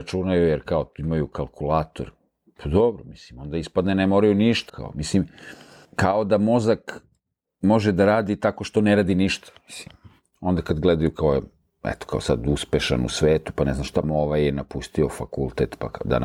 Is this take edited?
yes; 2 cuts; at 4.7 s, 14.0 s

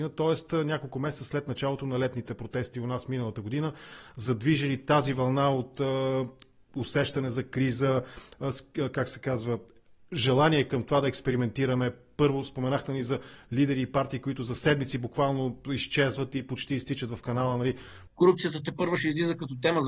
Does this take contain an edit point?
yes; 1 cut; at 18.1 s

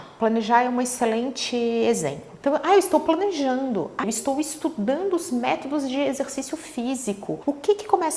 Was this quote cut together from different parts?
yes; 1 cut; at 4.0 s

